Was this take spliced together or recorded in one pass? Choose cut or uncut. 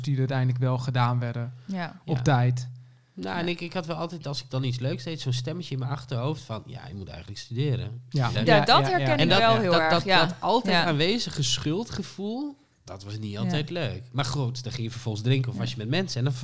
cut